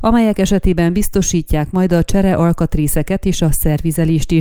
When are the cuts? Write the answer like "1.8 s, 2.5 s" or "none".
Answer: none